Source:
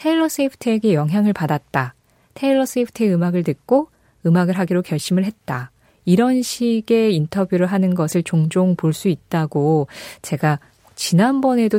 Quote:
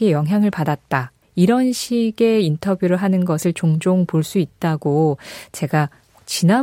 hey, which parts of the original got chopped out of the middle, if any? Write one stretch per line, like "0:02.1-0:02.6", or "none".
0:02.0-0:05.9